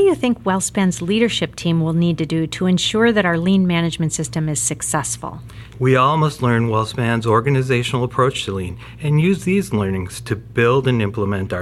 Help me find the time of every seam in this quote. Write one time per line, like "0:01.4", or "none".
0:05.7